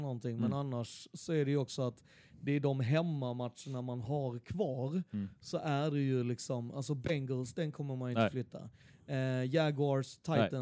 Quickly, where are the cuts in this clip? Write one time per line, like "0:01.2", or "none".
none

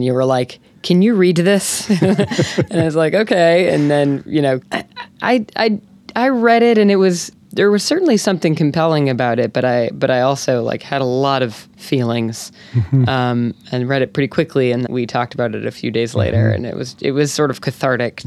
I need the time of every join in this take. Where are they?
0:04.6
0:14.9

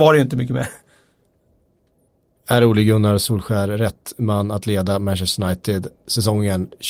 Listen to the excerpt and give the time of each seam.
none

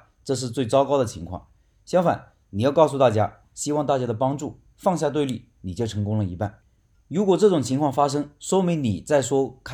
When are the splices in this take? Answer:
0:03.4
0:06.9

